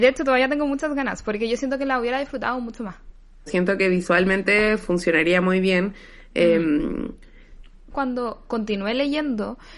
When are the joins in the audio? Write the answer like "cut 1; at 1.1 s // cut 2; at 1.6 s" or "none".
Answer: cut 1; at 3.5 s // cut 2; at 7.9 s